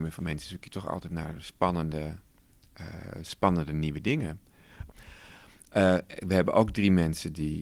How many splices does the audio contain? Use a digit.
1